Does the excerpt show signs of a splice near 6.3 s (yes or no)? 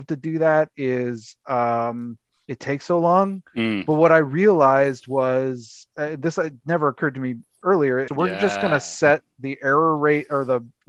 no